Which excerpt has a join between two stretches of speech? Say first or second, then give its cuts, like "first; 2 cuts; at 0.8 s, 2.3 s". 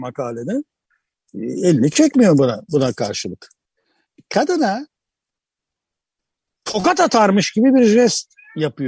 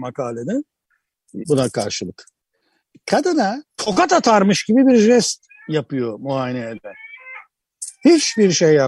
second; 2 cuts; at 1.4 s, 3.7 s